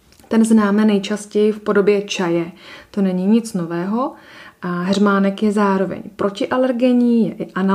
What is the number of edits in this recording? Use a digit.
0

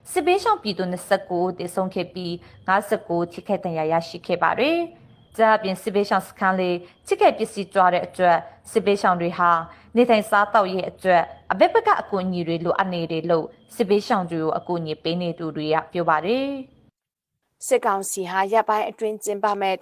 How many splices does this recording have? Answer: 0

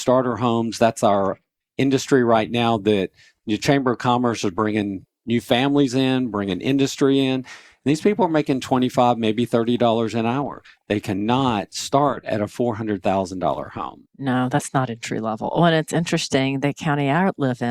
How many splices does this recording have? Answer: 0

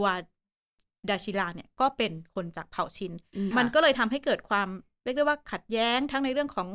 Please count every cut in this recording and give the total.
1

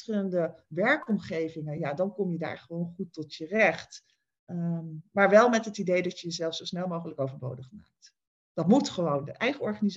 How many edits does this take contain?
0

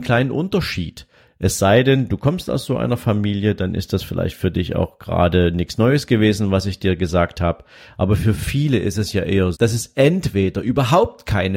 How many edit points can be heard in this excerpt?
1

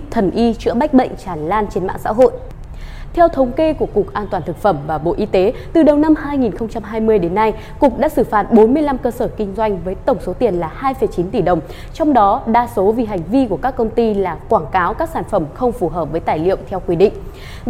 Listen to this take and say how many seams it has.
0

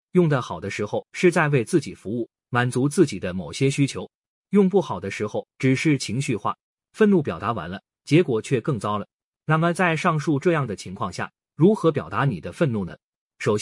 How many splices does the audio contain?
0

